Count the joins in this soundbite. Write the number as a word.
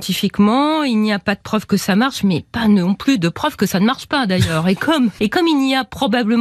one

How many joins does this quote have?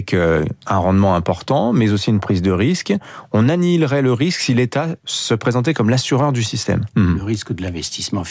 one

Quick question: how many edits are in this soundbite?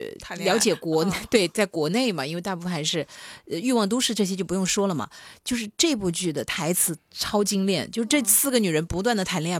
zero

